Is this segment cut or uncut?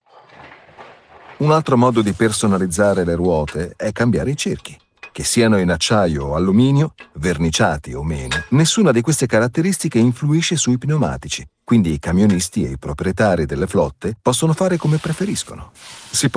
uncut